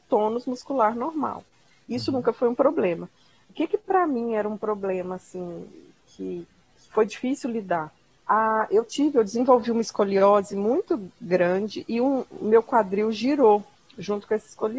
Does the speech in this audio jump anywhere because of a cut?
no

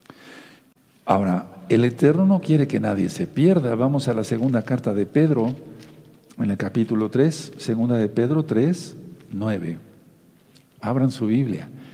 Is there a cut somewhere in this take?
no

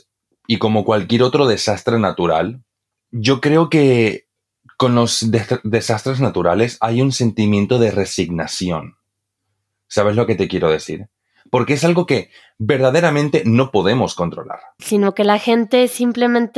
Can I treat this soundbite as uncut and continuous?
no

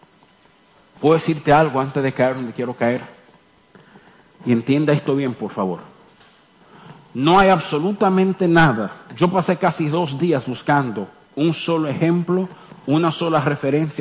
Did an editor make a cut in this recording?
yes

